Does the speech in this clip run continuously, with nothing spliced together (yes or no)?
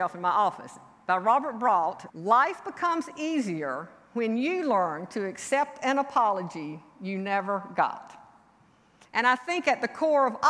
no